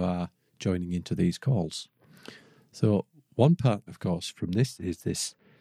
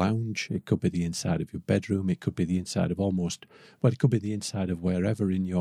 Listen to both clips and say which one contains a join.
first; 1 cut; at 3.9 s

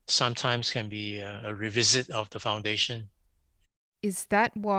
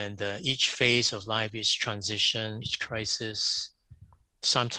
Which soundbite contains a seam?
second; 1 cut; at 2.6 s

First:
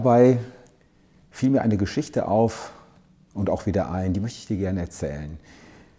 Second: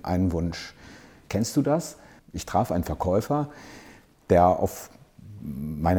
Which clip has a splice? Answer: second; 1 cut; at 2.2 s

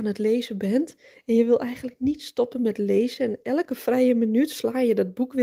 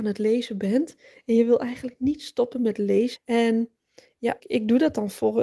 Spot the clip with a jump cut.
second; 2 cuts; at 3.2 s, 4.4 s

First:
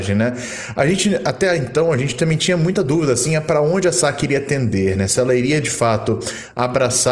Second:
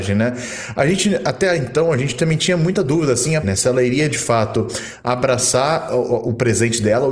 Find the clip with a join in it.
second; 1 cut; at 3.4 s

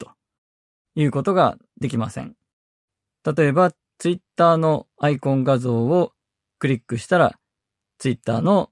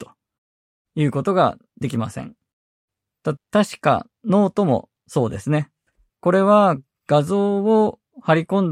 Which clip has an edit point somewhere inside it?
second; 2 cuts; at 3.4 s, 6.1 s

